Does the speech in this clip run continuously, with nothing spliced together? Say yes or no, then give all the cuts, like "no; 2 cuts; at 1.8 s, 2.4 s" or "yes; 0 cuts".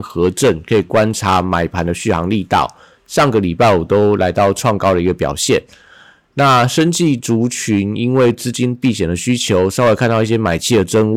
yes; 0 cuts